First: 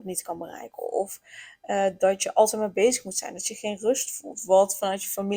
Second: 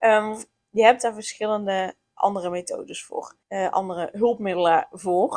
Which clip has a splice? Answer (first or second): second